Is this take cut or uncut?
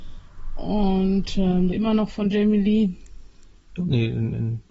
cut